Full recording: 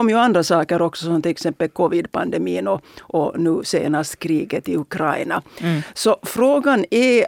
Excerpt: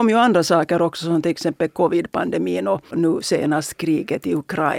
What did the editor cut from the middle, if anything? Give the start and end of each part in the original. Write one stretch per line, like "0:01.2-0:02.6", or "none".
0:02.9-0:03.3